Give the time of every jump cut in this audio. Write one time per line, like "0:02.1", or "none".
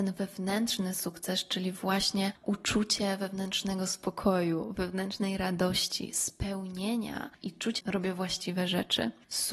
0:07.8